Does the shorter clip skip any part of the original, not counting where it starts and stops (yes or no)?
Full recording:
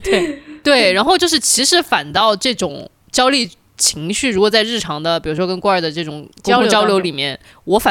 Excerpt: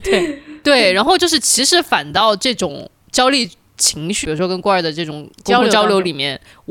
yes